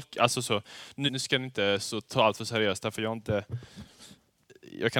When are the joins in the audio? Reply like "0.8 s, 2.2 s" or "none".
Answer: 1.1 s